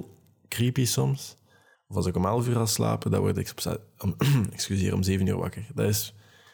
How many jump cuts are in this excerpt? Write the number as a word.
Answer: one